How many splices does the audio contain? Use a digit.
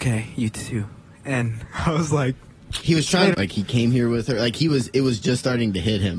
1